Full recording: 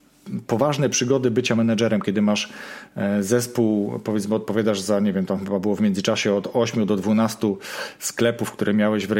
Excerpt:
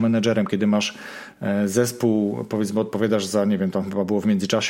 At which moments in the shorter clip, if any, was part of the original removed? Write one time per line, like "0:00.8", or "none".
none